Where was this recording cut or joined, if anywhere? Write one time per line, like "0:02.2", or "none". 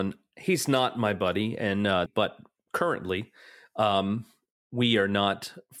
0:02.1

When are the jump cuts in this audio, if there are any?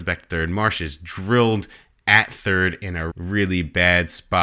0:03.1

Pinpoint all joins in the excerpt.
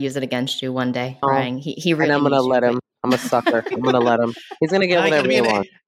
0:01.2

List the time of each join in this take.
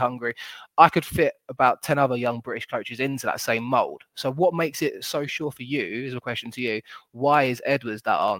none

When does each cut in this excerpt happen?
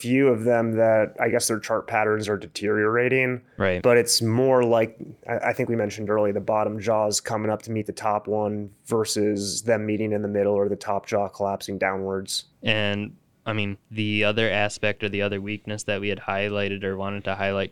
0:12.5
0:13.8

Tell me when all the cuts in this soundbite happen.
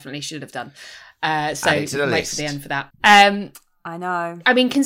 0:02.9

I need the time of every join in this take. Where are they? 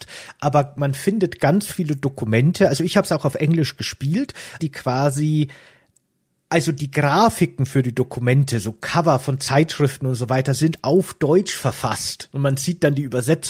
0:04.6

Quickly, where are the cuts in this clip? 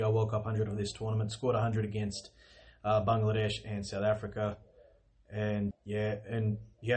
0:05.7

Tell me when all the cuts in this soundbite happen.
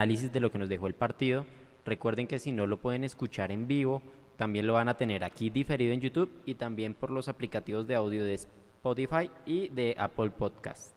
none

